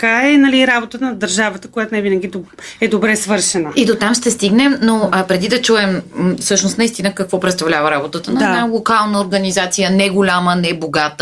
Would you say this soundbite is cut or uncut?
uncut